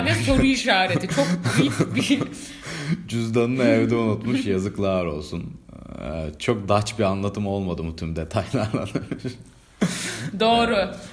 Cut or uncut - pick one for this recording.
uncut